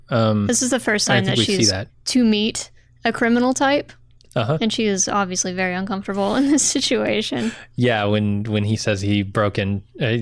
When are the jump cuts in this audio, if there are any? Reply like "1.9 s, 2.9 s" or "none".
1.9 s